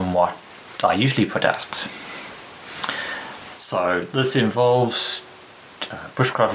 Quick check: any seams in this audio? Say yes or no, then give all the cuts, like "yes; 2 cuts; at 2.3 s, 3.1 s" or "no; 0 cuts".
yes; 1 cut; at 3.6 s